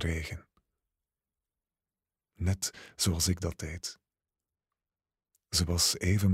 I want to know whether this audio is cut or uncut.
uncut